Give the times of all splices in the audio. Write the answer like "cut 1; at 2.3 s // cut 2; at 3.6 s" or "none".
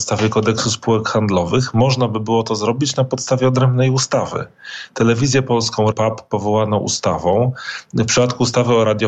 cut 1; at 5.9 s